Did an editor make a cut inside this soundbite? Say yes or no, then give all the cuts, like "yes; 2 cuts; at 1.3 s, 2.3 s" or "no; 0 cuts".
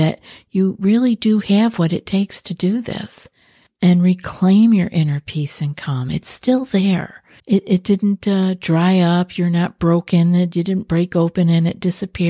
yes; 1 cut; at 7.4 s